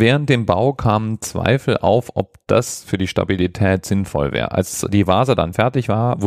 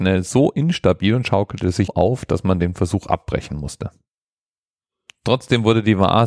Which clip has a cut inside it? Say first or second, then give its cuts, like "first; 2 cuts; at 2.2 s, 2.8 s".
second; 1 cut; at 1.9 s